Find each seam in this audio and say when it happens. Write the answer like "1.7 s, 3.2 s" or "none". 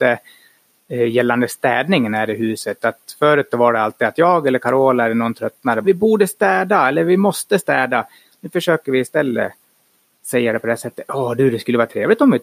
5.8 s